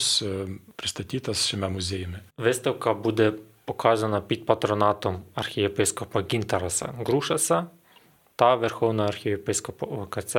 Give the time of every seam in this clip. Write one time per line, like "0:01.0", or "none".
0:02.3